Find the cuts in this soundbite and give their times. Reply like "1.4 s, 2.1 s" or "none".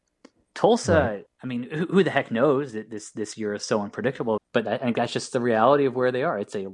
1.3 s, 4.4 s